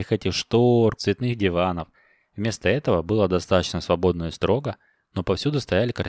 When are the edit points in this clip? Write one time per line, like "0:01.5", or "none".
0:01.0